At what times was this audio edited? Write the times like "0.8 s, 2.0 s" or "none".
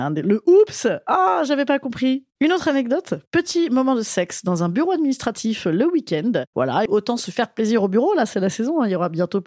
6.9 s